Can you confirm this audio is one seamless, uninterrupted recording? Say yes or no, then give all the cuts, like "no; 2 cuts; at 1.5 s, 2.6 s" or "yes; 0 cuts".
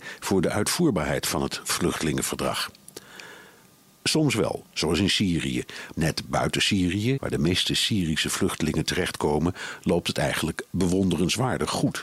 no; 2 cuts; at 5.9 s, 7.2 s